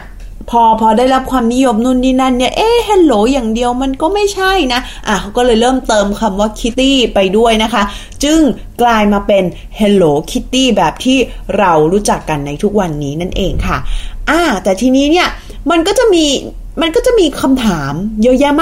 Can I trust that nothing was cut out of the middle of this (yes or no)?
no